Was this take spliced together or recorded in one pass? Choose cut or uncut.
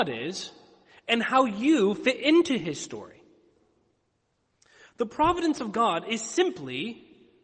uncut